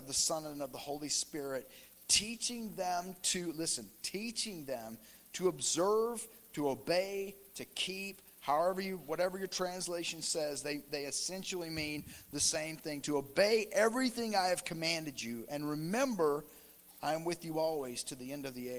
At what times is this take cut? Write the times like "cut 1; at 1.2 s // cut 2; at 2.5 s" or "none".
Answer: none